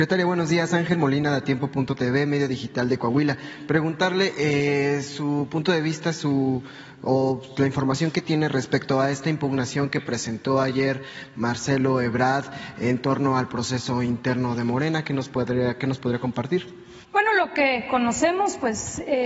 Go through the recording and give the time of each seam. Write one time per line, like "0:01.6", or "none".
0:17.0